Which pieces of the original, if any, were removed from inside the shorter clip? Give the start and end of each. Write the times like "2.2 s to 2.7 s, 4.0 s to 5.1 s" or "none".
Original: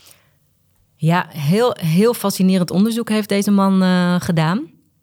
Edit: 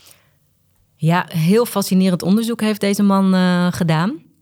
1.3 s to 1.8 s